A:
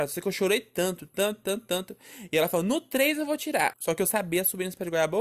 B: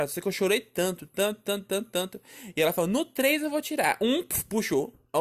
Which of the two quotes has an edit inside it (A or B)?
A